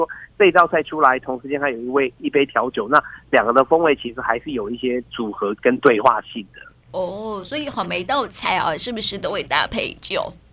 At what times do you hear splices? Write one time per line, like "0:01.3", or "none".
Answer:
0:05.6

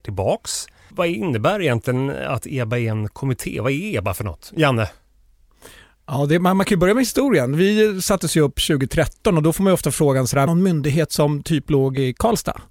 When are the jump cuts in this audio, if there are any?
0:00.9
0:10.5

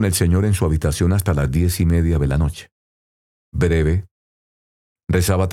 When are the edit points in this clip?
0:03.3

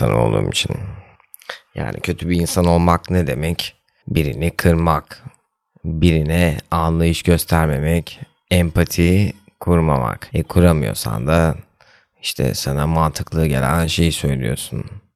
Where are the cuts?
none

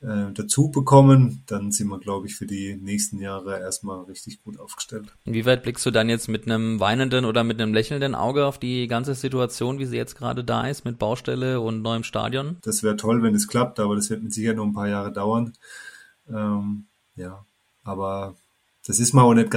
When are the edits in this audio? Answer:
0:12.6

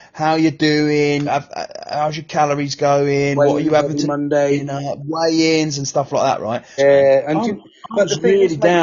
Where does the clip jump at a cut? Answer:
0:01.3
0:06.8

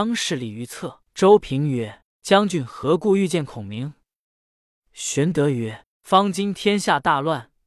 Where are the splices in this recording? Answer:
0:01.0

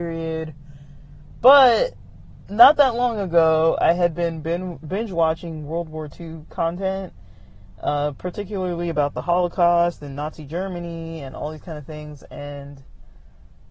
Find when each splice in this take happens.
none

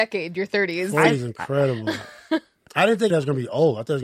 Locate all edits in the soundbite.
0:03.1

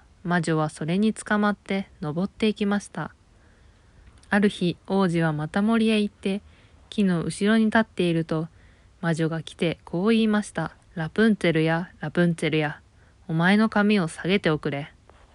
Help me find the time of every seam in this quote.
0:04.1
0:10.8

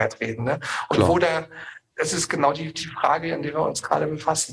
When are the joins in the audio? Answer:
0:01.9

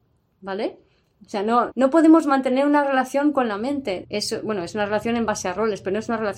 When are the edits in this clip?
0:01.7
0:04.0

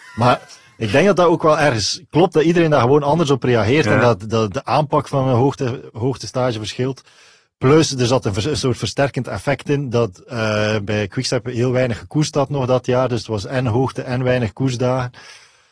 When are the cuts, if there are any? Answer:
0:10.9

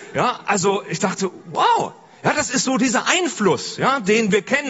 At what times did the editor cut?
none

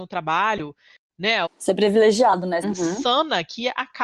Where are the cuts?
0:01.5
0:02.6

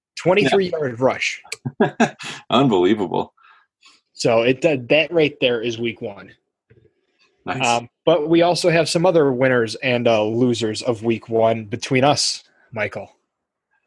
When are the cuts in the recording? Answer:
none

